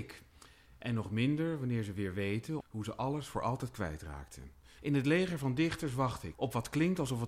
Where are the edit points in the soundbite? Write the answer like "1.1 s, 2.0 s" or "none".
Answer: 2.6 s, 4.8 s, 6.3 s